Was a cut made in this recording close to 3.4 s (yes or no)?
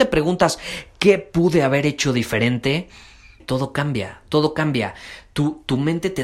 yes